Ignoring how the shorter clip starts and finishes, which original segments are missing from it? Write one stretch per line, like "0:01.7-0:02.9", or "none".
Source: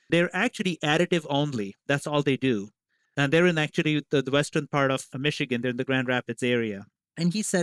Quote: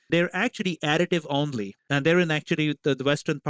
0:01.8-0:03.1